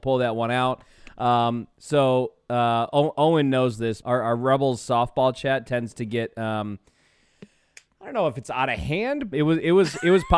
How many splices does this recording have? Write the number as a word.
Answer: two